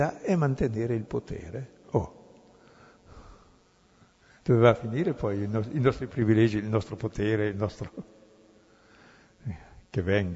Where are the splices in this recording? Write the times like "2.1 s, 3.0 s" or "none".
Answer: 1.8 s